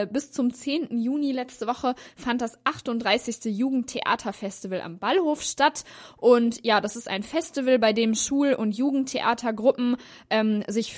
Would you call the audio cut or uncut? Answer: uncut